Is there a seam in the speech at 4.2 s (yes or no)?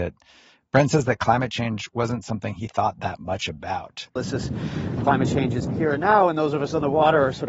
yes